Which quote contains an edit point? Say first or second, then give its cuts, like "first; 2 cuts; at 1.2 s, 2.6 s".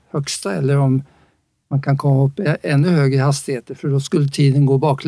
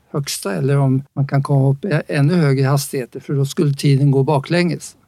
second; 1 cut; at 1.1 s